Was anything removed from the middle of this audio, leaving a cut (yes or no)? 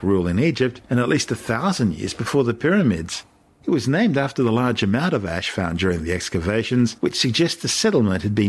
yes